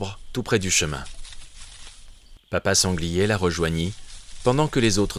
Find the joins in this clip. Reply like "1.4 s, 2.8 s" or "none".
2.4 s